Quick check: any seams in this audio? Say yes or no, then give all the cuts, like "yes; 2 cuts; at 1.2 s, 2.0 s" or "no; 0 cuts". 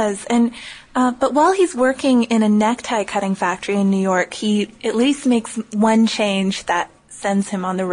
no; 0 cuts